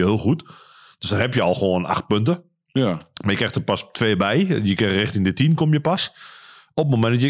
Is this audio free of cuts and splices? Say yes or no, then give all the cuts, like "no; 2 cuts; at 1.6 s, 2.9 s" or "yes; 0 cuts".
yes; 0 cuts